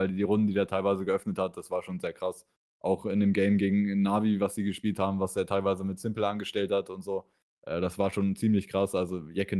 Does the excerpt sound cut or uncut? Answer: uncut